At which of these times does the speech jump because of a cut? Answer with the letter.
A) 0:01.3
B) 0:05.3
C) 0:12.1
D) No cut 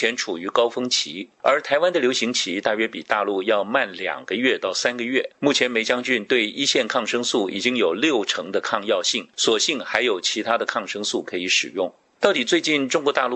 B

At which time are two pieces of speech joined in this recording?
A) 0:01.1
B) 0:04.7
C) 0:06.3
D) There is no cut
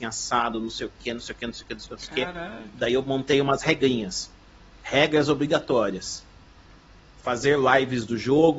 D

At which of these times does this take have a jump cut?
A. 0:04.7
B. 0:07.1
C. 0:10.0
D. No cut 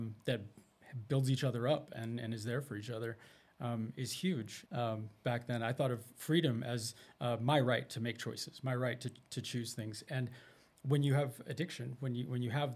A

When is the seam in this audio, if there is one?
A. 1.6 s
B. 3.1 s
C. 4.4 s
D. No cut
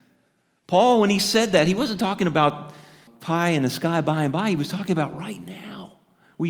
B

